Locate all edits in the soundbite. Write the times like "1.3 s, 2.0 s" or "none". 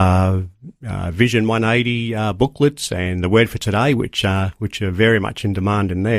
none